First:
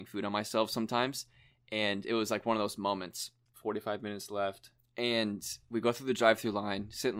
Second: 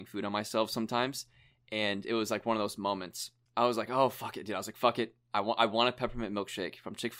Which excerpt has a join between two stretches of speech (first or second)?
first